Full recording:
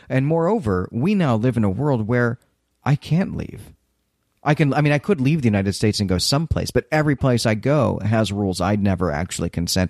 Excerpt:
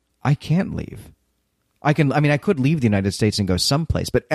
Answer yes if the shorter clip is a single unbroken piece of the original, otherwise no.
yes